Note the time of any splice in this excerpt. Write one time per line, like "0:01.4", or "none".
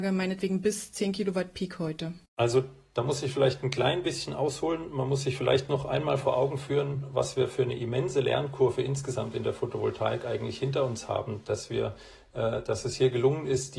0:02.3